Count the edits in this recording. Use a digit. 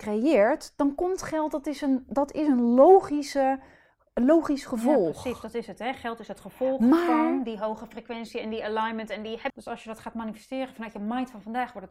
1